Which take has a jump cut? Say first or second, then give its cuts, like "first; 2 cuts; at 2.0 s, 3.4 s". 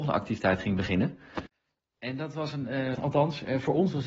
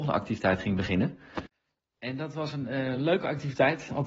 first; 1 cut; at 3.0 s